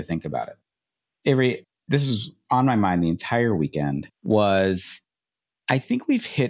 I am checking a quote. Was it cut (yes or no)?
yes